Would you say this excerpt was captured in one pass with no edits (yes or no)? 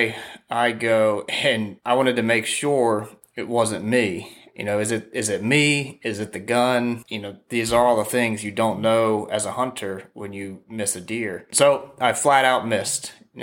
no